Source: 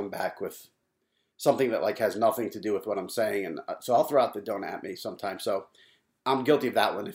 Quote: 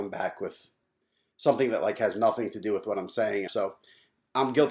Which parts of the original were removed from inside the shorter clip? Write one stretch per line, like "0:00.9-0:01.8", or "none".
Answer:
0:03.5-0:05.4